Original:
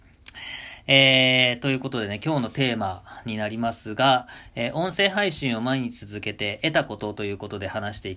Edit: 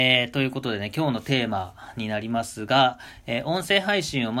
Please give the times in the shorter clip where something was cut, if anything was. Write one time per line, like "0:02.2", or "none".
none